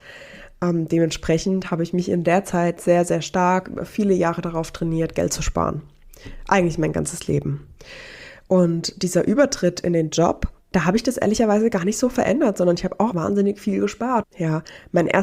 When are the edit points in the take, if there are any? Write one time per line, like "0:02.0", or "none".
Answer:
0:10.6
0:13.1
0:14.2